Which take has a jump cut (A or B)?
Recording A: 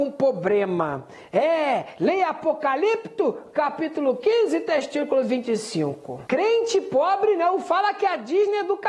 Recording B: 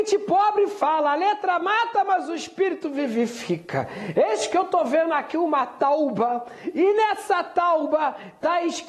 A